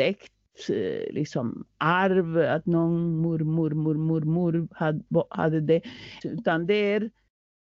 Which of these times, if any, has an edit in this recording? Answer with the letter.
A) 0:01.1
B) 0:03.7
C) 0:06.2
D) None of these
C